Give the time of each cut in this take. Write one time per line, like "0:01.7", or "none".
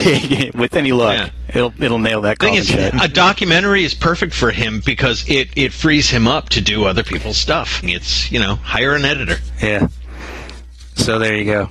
0:07.8